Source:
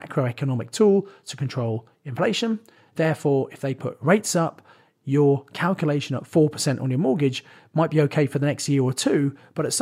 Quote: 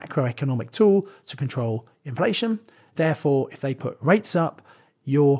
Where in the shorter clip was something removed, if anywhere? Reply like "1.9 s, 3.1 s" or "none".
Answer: none